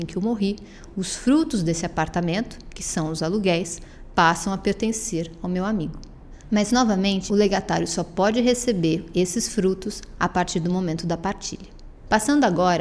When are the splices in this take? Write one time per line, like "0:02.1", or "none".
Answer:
0:07.3